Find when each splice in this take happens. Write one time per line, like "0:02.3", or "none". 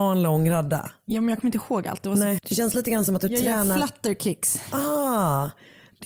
0:02.4